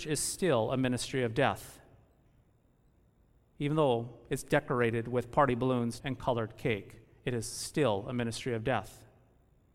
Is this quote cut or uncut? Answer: cut